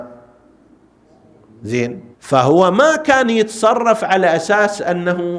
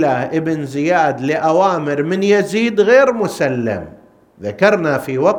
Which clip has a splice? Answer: first; 1 cut; at 2.1 s

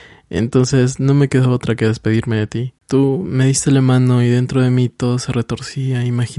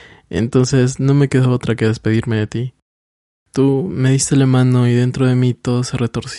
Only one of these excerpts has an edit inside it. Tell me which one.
first; 1 cut; at 2.8 s

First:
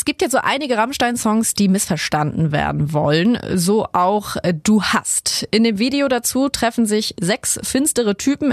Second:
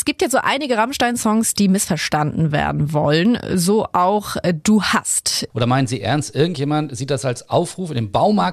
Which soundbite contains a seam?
second; 1 cut; at 5.5 s

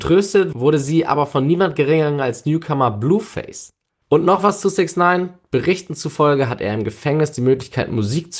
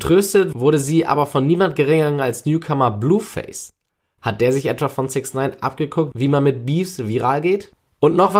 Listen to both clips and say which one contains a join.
first; 1 cut; at 4.0 s

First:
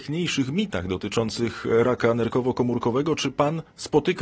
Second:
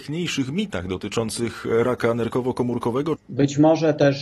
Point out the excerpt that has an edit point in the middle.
second; 1 cut; at 3.2 s

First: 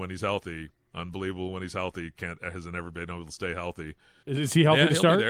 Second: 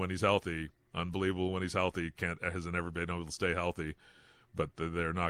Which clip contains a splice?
first; 1 cut; at 4.2 s

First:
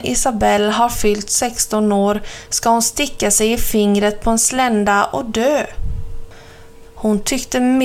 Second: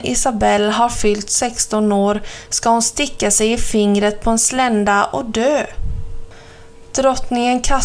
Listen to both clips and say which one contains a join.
first; 1 cut; at 6.8 s

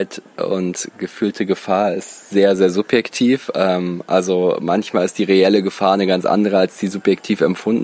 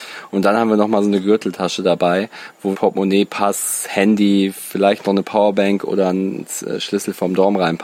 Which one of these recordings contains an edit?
second; 1 cut; at 2.7 s

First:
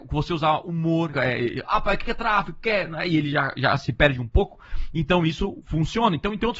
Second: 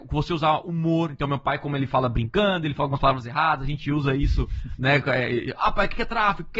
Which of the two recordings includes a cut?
first; 1 cut; at 1.1 s

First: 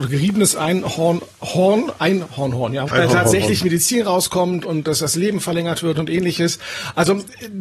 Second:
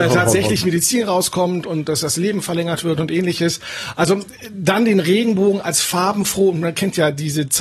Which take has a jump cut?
first; 1 cut; at 2.9 s

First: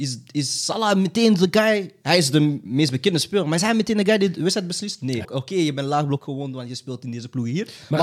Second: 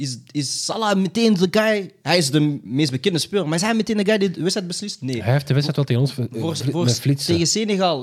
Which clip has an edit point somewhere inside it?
first; 1 cut; at 5.2 s

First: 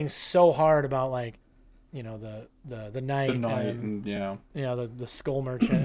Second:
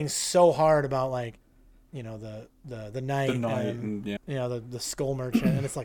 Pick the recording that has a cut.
second; 1 cut; at 4.2 s

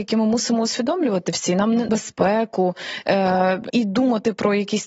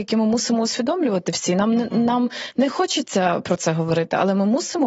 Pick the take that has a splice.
first; 2 cuts; at 1.9 s, 3.7 s

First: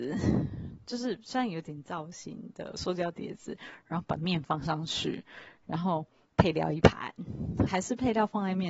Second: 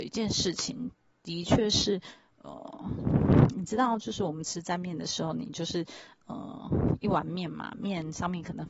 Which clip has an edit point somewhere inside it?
first; 1 cut; at 7.7 s

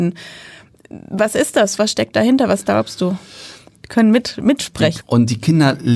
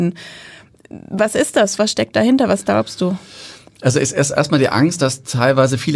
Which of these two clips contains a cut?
first; 2 cuts; at 3.8 s, 5.0 s

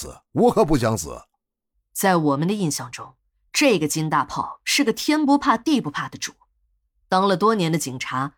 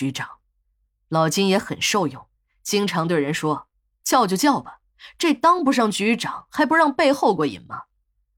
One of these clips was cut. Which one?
second; 1 cut; at 7.4 s

